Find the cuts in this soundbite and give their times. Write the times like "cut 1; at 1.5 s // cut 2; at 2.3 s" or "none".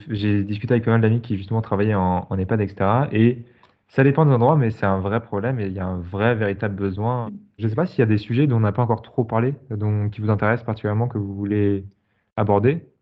cut 1; at 7.3 s